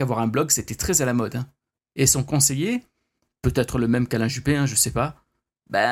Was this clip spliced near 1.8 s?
yes; 1 cut; at 1.8 s

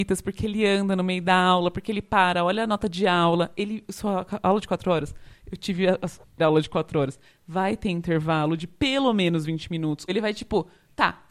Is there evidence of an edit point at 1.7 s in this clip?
no; 2 cuts; at 6.4 s, 10.1 s

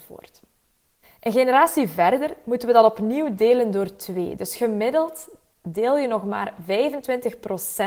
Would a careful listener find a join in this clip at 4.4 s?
no; 1 cut; at 1.0 s

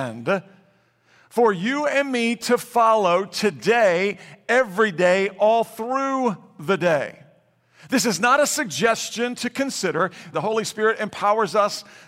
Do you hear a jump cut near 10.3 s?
yes; 1 cut; at 10.3 s

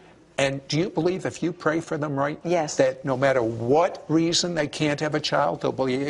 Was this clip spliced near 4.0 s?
no; 1 cut; at 2.4 s

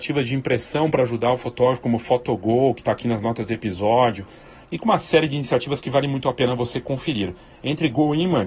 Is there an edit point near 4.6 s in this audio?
yes; 1 cut; at 4.6 s

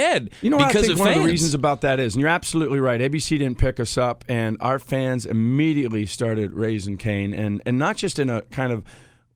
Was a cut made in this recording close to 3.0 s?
no; 0 cuts

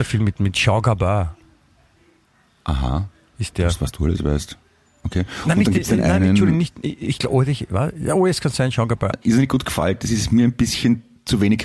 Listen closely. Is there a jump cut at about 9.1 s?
yes; 1 cut; at 9.1 s

